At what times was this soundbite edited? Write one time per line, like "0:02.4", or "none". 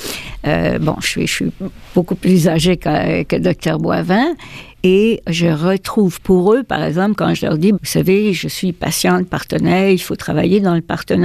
0:07.7

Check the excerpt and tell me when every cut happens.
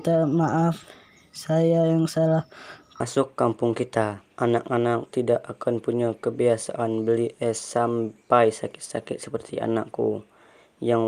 0:03.0
0:04.3

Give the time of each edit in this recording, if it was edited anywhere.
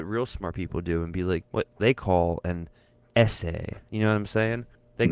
0:01.4

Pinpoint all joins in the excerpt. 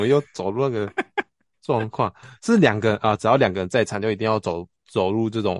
none

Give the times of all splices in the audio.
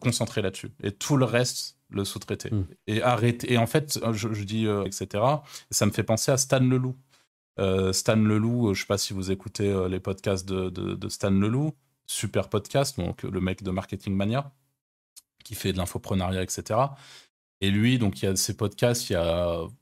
0:04.9

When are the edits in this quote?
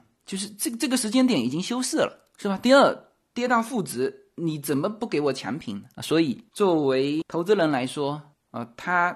none

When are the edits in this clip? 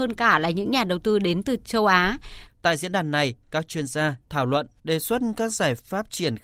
0:02.5
0:04.3

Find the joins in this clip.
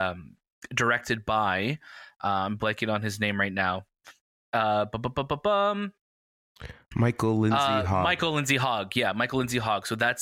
none

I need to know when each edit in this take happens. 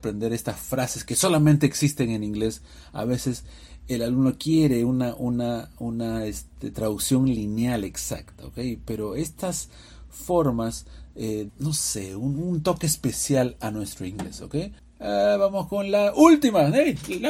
0:11.5
0:14.8

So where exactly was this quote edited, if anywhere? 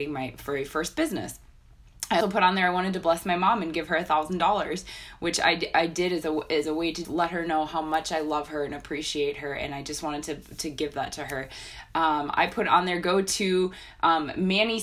0:02.2
0:07.0

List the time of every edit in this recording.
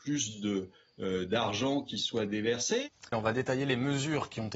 0:03.1

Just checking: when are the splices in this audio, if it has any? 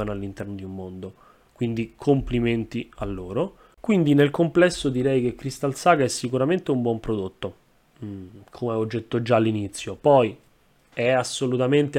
none

